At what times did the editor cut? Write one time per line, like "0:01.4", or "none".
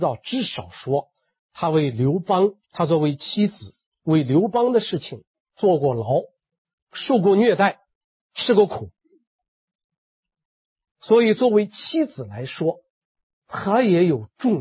0:02.6
0:05.4